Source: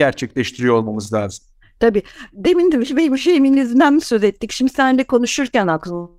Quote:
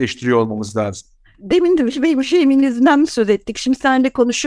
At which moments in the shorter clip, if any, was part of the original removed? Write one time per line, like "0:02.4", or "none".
0:01.3